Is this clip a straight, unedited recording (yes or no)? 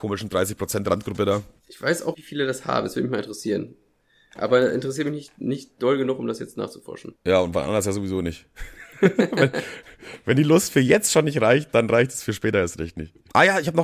no